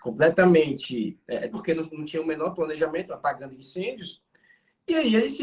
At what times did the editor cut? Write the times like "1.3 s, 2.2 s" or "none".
1.5 s, 3.1 s